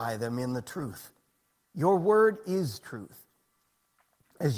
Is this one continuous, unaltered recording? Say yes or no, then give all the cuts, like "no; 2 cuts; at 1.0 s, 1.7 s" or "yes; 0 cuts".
yes; 0 cuts